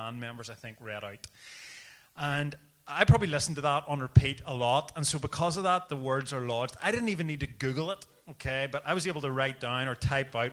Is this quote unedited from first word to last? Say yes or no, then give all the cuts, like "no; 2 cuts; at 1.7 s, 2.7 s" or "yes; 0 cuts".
yes; 0 cuts